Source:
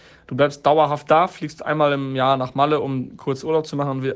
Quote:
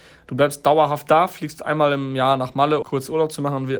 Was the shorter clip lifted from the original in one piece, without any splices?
no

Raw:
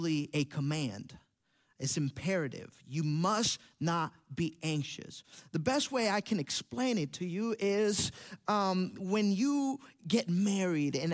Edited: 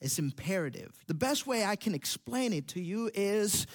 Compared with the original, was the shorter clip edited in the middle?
yes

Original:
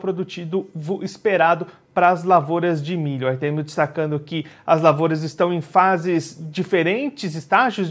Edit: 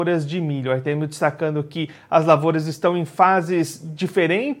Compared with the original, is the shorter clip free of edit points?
yes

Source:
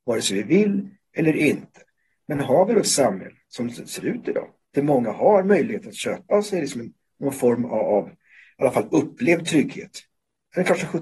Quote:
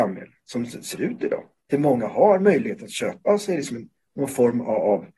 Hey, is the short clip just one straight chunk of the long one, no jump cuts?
yes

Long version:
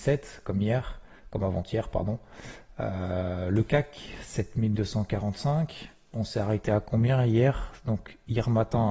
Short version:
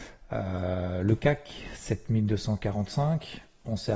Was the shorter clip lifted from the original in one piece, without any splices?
yes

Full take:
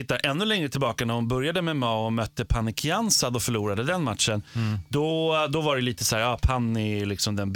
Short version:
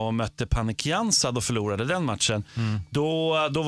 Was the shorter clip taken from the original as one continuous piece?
yes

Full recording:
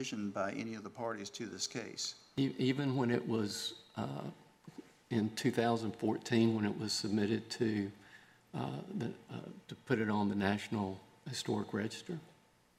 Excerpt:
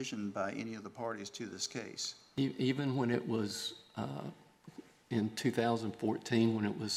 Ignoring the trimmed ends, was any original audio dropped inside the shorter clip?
no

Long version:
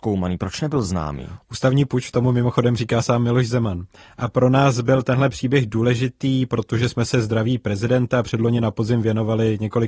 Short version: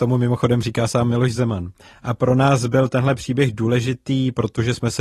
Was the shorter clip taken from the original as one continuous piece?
yes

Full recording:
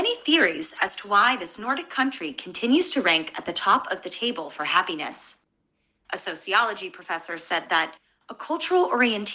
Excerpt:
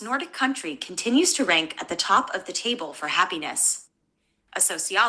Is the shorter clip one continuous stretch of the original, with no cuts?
yes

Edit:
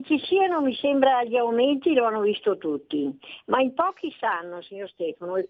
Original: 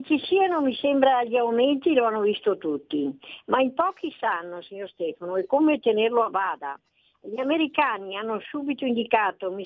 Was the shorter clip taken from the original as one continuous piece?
yes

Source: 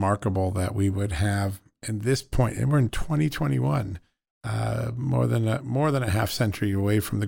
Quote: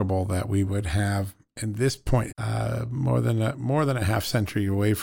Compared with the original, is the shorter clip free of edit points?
no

